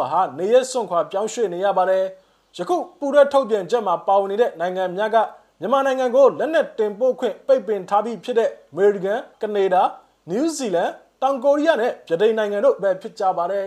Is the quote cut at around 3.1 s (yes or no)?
no